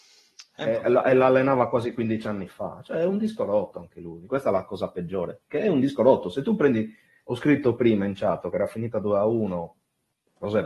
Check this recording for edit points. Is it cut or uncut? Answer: cut